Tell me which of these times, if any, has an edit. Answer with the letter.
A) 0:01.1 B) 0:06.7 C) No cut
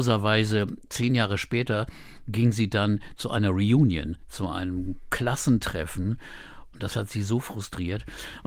B